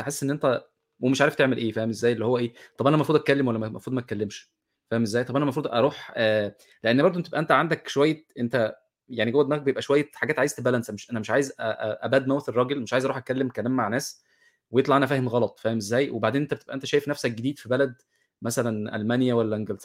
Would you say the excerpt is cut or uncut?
uncut